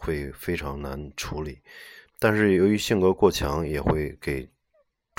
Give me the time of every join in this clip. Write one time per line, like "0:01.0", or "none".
0:02.0